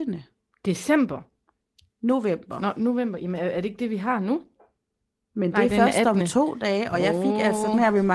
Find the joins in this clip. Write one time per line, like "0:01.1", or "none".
none